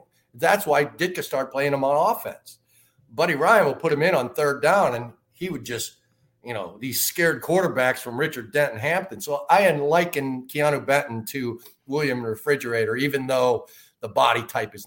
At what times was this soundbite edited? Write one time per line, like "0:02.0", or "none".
none